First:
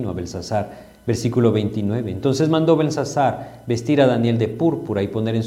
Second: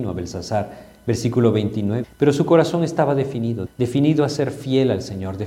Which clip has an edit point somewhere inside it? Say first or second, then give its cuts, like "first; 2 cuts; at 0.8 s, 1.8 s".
second; 2 cuts; at 2.0 s, 3.7 s